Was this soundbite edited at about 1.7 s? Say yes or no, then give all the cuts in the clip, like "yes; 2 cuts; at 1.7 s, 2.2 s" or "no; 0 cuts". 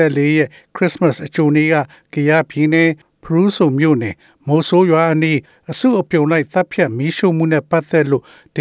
no; 0 cuts